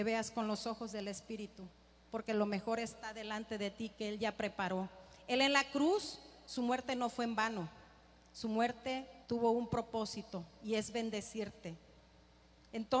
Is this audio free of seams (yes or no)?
no